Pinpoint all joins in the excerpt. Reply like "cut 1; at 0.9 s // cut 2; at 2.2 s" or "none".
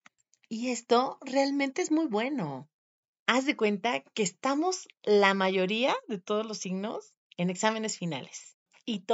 none